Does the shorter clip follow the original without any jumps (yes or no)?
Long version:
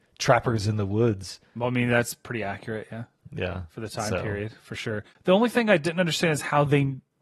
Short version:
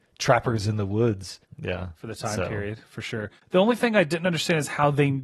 no